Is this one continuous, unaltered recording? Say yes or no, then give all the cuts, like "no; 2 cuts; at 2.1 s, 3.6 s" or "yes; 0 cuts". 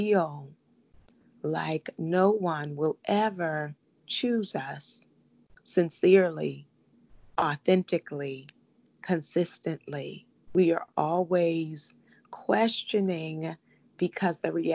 no; 1 cut; at 10.5 s